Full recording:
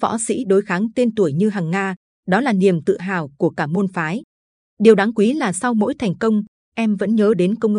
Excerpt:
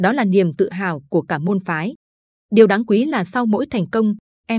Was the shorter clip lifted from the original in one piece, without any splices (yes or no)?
yes